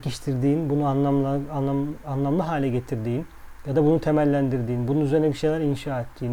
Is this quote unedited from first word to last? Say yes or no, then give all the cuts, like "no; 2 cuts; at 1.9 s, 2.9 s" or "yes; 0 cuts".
yes; 0 cuts